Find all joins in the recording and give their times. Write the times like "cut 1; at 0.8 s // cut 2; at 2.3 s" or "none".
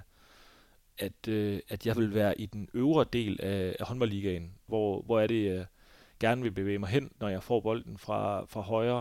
cut 1; at 4.7 s // cut 2; at 7.2 s

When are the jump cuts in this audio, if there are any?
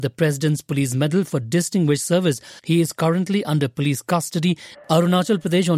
cut 1; at 2.6 s // cut 2; at 4.7 s

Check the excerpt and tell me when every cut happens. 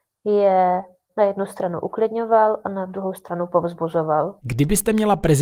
none

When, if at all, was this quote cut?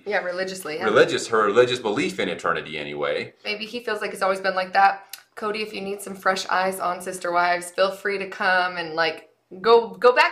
cut 1; at 3.4 s

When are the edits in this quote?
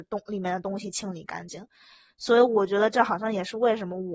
none

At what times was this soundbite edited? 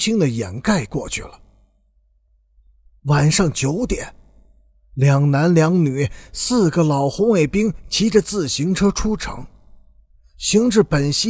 none

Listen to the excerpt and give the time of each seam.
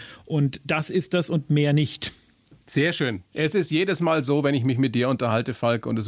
none

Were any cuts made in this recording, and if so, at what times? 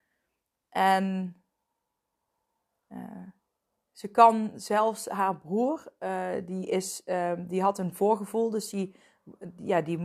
none

